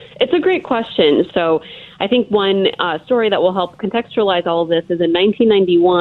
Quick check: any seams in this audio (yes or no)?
yes